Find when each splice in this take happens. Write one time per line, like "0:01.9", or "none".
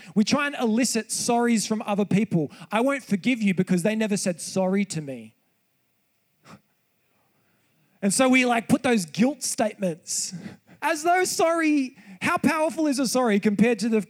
0:10.8